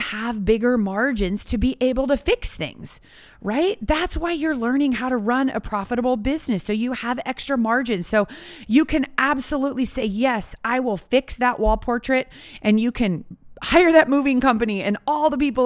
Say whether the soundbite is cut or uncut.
uncut